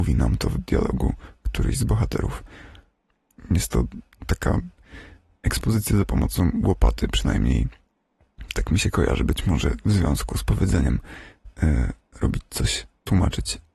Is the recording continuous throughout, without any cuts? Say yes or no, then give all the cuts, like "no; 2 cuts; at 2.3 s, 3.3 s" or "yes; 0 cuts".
yes; 0 cuts